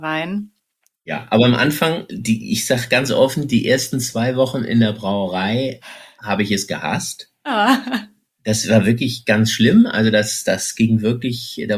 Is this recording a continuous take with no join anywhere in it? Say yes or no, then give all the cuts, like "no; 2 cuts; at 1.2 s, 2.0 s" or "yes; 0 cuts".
yes; 0 cuts